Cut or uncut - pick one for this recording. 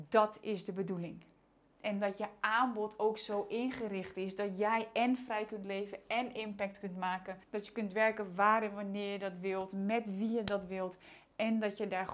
cut